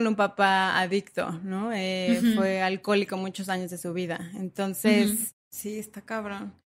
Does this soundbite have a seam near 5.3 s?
yes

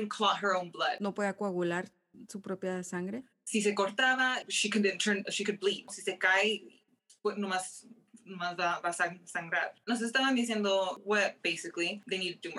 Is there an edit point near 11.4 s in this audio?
yes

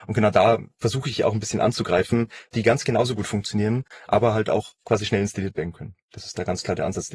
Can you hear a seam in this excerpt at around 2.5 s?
yes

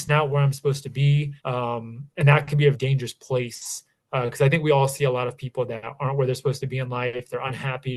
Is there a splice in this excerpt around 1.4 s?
yes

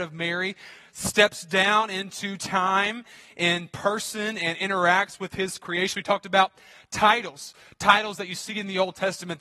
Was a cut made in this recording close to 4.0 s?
no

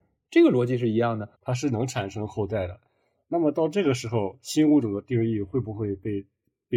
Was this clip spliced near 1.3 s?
yes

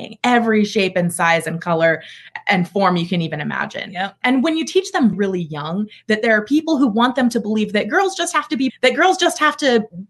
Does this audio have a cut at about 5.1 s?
yes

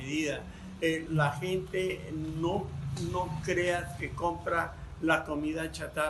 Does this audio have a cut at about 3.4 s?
no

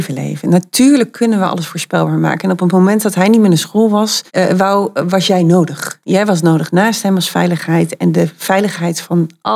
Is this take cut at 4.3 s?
yes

